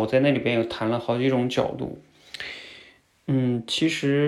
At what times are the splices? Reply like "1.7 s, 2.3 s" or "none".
none